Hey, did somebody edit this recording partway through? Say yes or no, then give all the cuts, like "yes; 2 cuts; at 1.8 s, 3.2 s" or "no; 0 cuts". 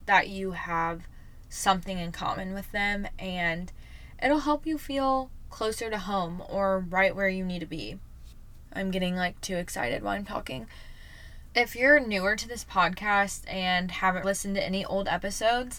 yes; 3 cuts; at 8.7 s, 11.4 s, 14.2 s